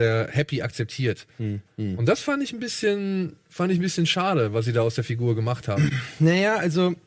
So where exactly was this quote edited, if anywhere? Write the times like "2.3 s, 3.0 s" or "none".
1.7 s